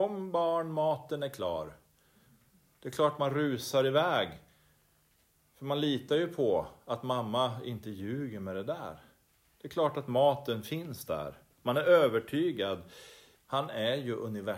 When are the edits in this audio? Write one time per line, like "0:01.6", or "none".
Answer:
0:13.4